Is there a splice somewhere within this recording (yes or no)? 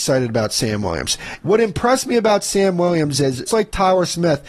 yes